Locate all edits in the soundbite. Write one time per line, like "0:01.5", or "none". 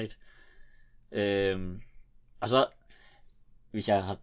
none